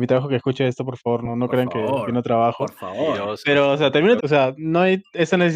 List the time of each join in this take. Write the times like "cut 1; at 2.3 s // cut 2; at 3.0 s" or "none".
cut 1; at 4.2 s